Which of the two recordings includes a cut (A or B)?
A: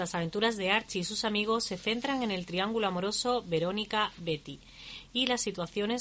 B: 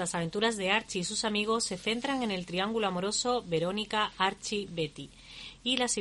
A